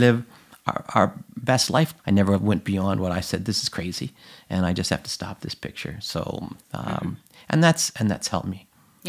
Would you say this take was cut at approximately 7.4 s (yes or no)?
no